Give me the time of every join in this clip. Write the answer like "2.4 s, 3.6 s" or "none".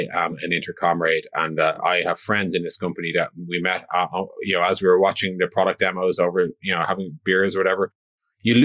none